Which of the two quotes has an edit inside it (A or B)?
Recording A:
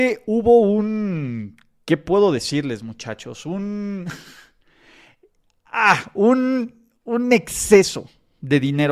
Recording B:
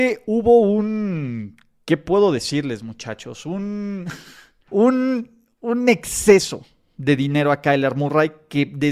B